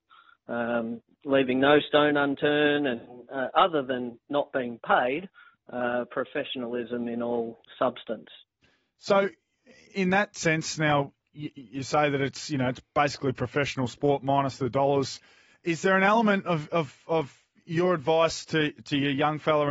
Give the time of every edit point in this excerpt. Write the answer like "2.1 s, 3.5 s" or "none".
none